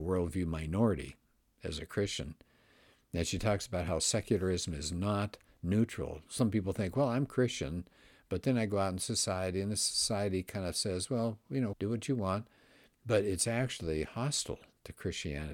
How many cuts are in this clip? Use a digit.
1